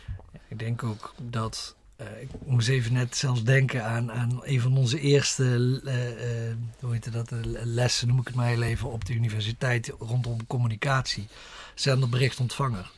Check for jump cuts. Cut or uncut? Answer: uncut